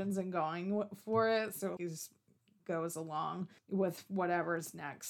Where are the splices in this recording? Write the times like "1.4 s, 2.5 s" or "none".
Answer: 1.8 s, 3.6 s